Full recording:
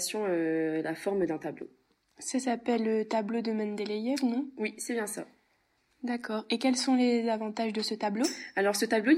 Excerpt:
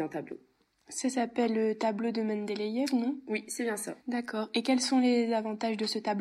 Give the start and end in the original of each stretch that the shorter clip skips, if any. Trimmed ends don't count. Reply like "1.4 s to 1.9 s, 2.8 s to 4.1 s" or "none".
5.3 s to 6.0 s